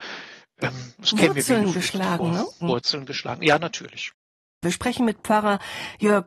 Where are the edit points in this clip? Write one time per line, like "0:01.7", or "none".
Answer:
0:02.6